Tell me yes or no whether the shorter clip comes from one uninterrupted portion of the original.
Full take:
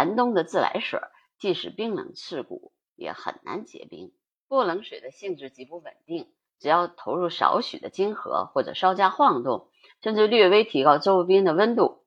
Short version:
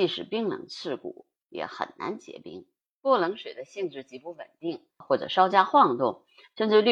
no